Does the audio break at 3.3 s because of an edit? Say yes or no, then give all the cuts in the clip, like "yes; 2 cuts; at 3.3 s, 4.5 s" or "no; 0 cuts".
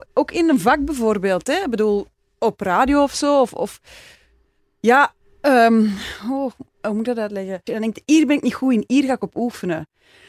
no; 1 cut; at 7.7 s